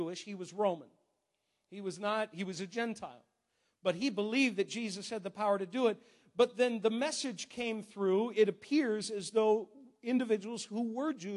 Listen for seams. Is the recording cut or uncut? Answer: uncut